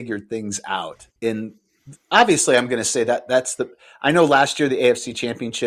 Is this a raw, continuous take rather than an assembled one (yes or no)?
no